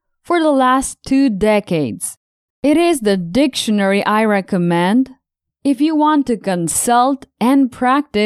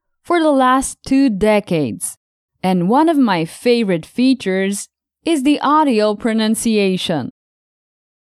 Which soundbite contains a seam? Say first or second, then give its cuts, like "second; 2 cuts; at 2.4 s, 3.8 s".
first; 1 cut; at 2.5 s